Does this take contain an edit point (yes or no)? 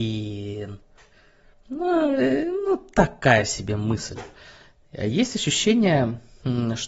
no